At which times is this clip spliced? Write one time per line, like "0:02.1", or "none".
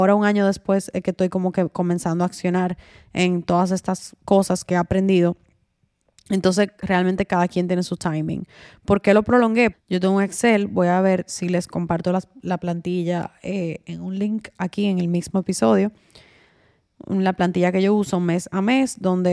0:09.7